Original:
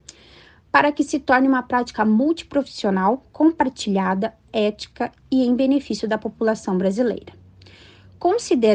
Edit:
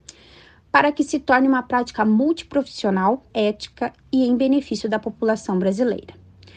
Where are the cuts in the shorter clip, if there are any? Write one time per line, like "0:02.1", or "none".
0:03.3